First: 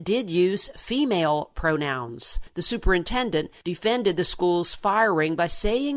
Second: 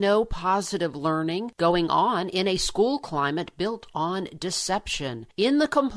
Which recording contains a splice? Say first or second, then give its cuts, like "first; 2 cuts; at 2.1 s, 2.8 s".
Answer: first; 1 cut; at 2.5 s